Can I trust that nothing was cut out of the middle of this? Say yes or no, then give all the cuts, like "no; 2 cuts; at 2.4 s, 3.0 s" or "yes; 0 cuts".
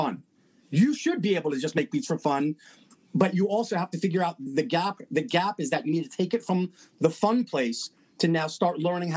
yes; 0 cuts